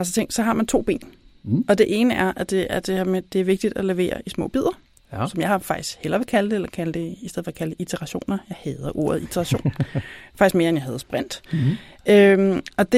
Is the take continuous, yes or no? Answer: yes